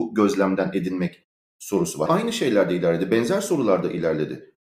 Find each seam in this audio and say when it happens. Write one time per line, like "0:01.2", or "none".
0:02.1